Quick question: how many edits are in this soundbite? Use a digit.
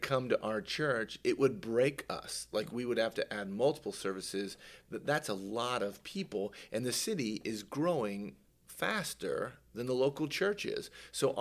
1